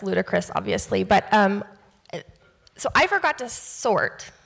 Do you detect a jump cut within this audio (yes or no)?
no